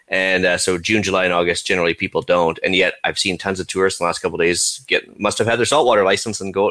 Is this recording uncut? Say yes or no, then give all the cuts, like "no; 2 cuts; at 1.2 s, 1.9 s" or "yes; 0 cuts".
yes; 0 cuts